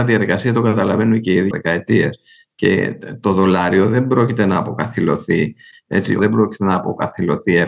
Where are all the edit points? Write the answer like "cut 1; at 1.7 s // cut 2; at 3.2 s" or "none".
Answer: cut 1; at 1.5 s // cut 2; at 6.2 s